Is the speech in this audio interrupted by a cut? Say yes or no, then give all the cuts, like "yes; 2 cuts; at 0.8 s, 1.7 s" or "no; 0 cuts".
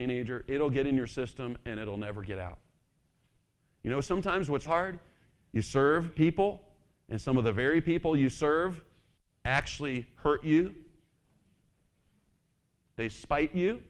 yes; 1 cut; at 4.7 s